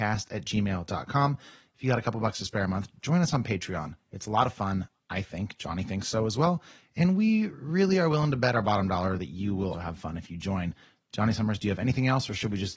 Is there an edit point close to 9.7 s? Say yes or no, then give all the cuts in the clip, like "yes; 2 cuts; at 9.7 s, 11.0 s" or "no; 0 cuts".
yes; 1 cut; at 9.7 s